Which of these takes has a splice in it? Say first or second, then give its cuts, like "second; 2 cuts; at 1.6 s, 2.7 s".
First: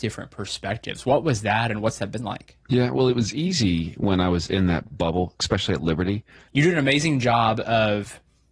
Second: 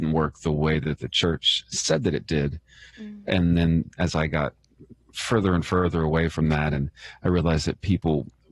first; 2 cuts; at 2.6 s, 6.5 s